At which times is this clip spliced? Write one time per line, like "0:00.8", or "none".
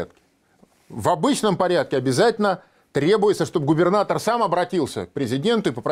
none